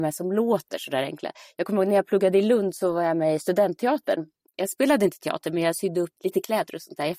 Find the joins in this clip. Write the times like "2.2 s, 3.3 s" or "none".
6.2 s